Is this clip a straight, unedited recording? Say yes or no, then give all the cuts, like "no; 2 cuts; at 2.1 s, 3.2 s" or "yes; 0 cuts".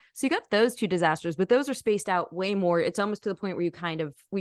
yes; 0 cuts